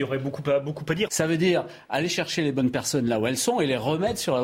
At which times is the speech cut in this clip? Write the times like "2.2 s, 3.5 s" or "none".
1.1 s